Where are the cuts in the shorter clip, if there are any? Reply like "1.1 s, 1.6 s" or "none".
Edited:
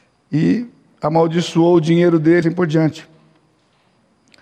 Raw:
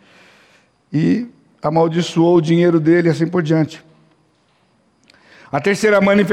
2.4 s